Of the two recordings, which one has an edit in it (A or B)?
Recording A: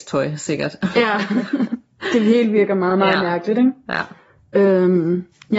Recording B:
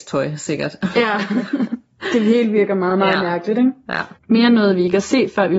B